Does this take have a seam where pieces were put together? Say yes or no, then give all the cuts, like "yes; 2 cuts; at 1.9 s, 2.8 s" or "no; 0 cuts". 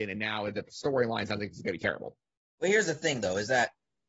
no; 0 cuts